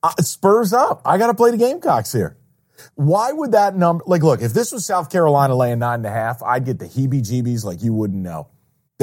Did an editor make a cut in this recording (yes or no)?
no